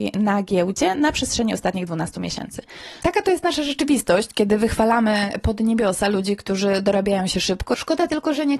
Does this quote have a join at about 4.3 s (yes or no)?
no